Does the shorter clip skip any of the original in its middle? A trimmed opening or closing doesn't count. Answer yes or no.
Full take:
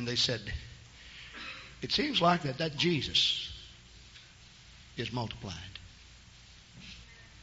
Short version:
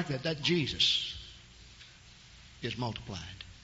no